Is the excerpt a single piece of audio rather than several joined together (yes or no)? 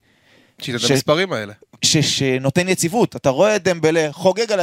yes